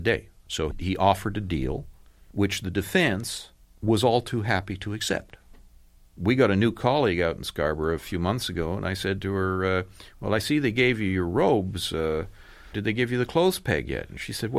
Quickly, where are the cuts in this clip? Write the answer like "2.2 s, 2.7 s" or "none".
none